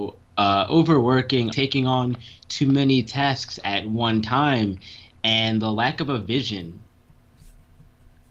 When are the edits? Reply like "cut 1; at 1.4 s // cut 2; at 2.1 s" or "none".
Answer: cut 1; at 1.5 s